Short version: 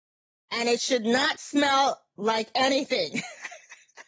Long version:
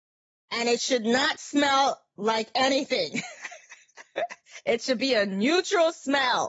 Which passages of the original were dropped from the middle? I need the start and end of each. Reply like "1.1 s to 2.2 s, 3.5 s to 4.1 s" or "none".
none